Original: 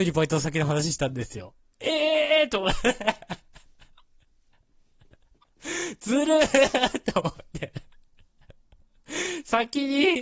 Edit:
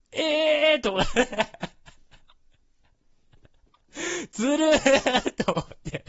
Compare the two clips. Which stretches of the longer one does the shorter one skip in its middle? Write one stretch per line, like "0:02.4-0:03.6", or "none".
none